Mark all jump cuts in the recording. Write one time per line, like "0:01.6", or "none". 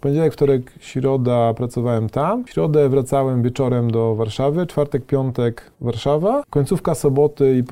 0:05.7